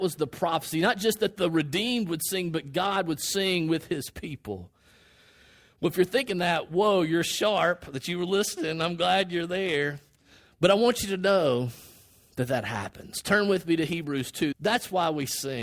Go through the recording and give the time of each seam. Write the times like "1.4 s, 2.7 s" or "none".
14.5 s